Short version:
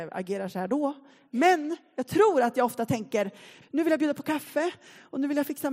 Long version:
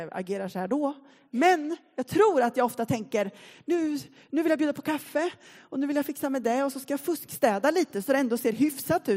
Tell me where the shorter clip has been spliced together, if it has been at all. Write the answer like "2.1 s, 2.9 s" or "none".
3.6 s